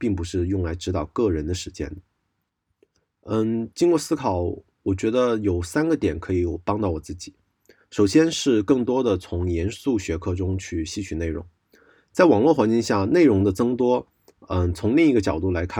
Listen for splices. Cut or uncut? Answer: uncut